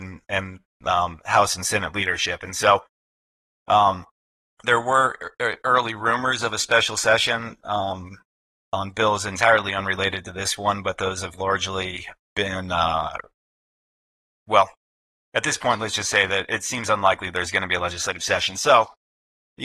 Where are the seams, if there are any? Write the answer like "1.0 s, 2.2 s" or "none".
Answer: none